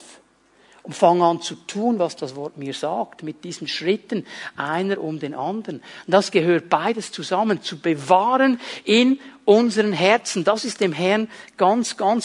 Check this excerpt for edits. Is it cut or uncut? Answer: uncut